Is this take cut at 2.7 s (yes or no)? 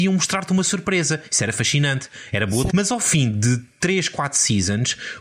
yes